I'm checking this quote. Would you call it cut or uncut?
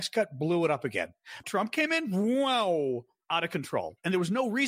cut